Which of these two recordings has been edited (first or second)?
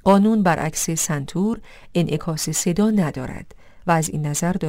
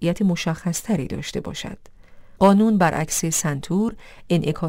second